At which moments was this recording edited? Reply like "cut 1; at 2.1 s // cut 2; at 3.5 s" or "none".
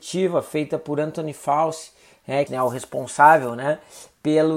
cut 1; at 2.5 s